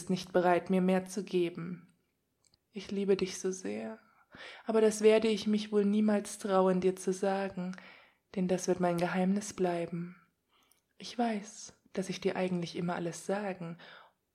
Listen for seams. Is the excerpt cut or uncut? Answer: cut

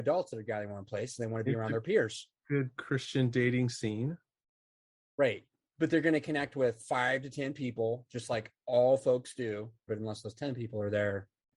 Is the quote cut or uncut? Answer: cut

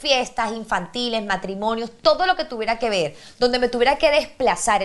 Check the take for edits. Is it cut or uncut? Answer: uncut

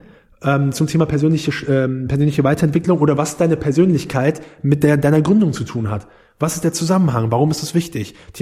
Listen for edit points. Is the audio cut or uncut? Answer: uncut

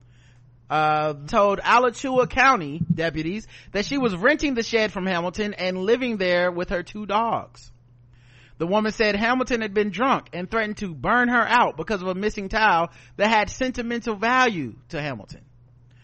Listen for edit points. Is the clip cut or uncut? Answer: cut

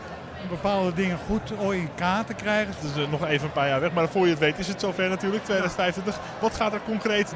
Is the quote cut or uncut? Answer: cut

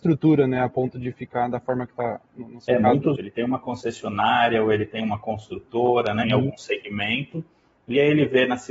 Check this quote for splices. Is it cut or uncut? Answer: cut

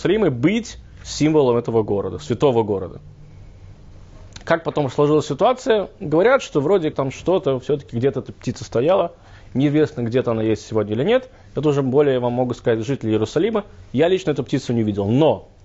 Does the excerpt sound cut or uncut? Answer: cut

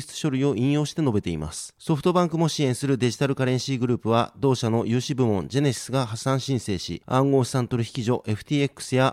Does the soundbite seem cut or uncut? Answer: cut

